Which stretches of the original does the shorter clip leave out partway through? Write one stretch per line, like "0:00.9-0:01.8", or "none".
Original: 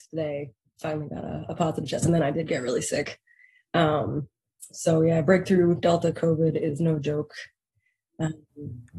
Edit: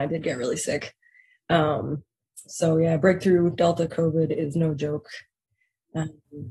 none